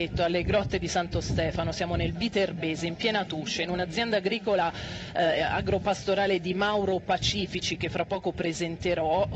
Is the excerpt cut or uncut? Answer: uncut